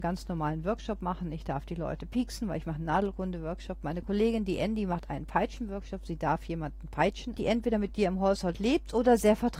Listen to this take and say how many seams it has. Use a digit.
1